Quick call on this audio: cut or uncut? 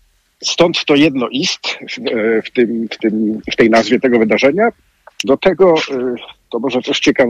cut